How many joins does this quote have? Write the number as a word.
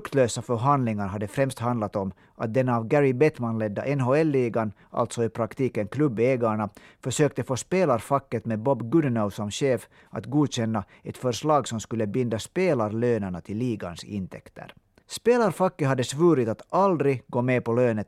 one